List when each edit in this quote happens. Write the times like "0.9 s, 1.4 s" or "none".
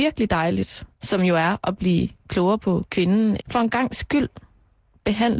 0.9 s, 3.4 s